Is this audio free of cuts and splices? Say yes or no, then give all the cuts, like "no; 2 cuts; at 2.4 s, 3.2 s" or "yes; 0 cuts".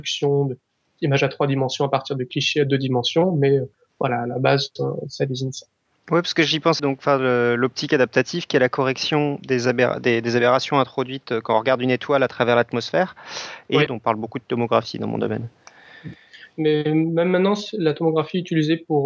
no; 2 cuts; at 6.8 s, 13.9 s